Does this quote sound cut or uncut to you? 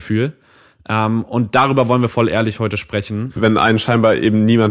cut